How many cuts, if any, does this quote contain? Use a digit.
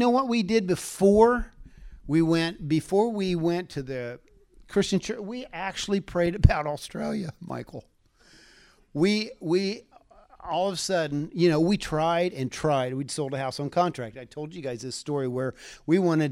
0